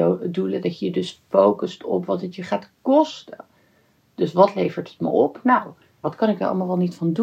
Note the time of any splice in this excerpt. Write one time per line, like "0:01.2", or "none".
0:06.0